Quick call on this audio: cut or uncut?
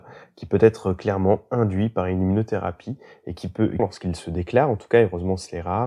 cut